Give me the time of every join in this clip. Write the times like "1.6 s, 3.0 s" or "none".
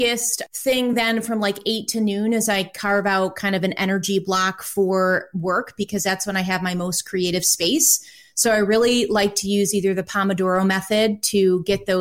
none